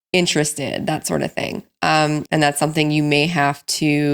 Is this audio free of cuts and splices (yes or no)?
no